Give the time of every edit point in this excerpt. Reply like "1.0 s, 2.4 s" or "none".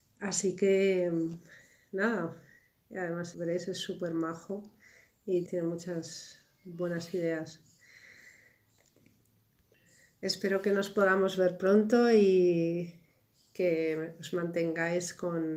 3.3 s, 5.5 s